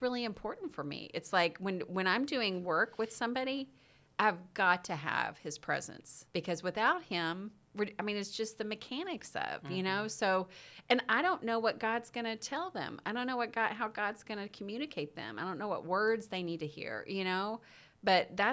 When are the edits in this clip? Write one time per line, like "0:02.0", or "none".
0:06.3